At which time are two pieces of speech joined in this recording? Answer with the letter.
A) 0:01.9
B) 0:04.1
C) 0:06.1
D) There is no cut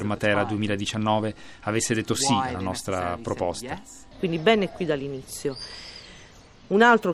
B